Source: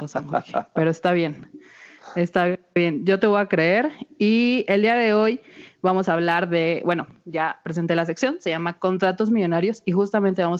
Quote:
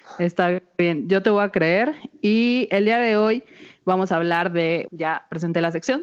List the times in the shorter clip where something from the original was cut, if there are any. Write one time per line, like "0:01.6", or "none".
0:04.8